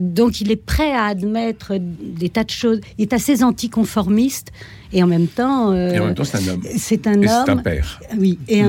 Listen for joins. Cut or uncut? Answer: uncut